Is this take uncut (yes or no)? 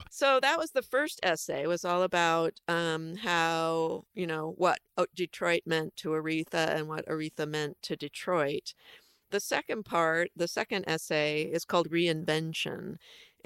yes